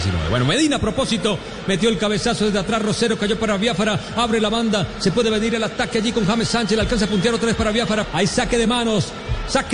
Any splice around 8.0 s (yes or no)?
yes